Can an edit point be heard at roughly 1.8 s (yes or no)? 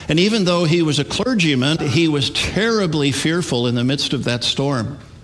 yes